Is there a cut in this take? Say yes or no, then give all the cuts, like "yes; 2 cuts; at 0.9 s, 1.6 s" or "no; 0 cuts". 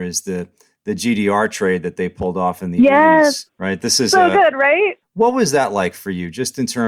yes; 2 cuts; at 3.5 s, 5.0 s